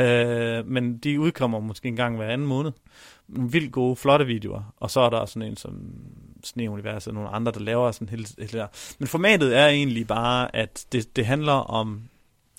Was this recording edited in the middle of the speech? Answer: no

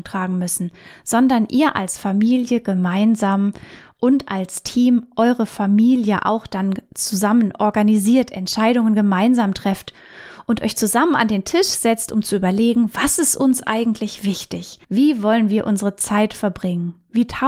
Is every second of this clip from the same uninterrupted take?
no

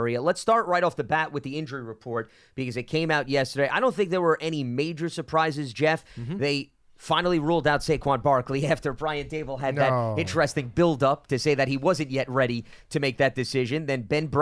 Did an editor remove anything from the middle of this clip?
no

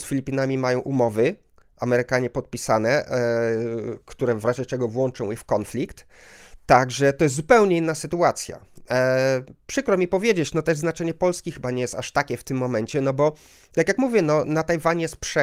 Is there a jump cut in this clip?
no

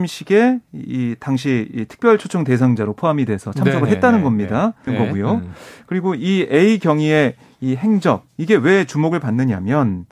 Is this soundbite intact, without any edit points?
no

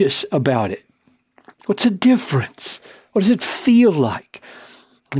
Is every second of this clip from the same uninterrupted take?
yes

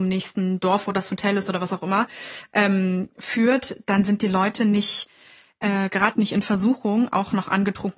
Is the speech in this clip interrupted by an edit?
no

